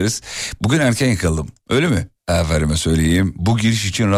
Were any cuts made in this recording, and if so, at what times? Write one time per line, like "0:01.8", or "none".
0:02.2